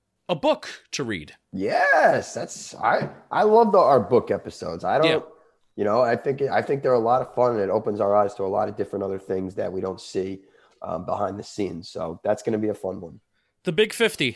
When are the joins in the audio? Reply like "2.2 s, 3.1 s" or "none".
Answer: none